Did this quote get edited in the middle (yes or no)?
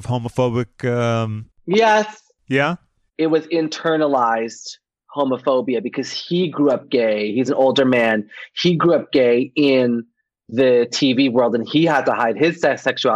yes